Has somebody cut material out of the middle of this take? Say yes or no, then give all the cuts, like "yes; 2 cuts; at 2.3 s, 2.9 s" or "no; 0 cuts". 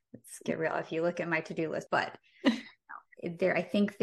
yes; 1 cut; at 1.9 s